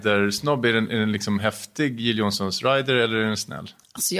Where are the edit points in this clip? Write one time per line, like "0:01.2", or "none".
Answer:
none